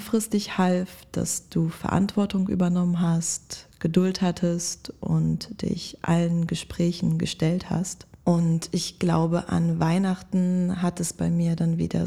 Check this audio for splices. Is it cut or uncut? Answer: uncut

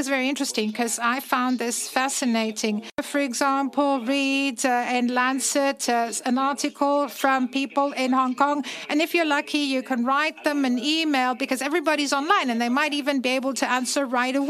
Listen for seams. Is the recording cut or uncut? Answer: uncut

